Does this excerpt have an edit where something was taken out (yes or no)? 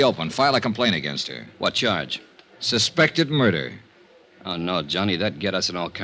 no